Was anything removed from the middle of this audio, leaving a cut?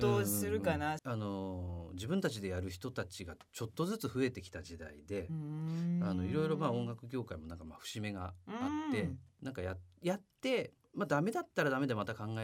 yes; 1 cut; at 1.0 s

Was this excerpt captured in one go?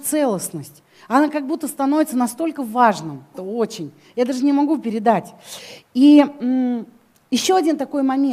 no; 1 cut; at 3.3 s

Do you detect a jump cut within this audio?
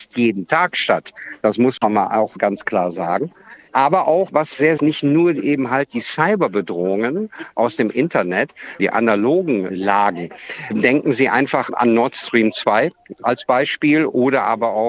yes; 2 cuts; at 4.8 s, 8.8 s

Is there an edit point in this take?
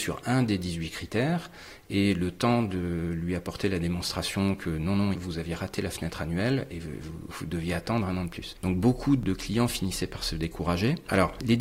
yes; 1 cut; at 5.1 s

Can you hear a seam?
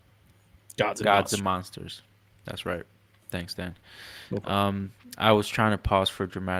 no; 0 cuts

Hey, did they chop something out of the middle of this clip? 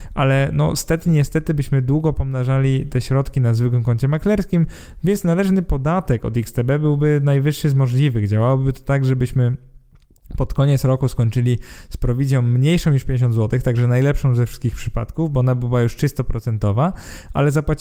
no; 0 cuts

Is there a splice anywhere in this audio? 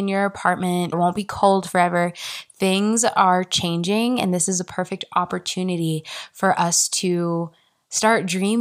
yes; 1 cut; at 0.9 s

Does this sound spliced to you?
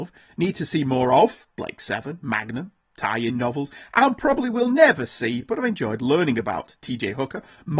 no; 0 cuts

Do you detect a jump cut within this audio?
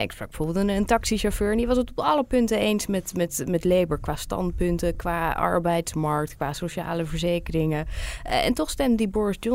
no; 0 cuts

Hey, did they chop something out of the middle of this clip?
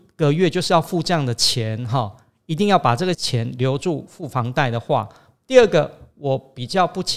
yes; 2 cuts; at 3.1 s, 5.4 s

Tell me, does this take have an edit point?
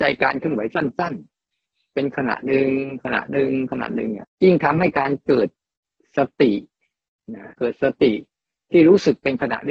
yes; 2 cuts; at 4.2 s, 7.5 s

